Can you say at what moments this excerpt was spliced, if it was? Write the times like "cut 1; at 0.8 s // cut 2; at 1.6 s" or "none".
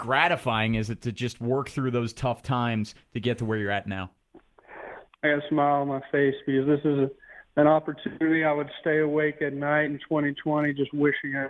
cut 1; at 5.1 s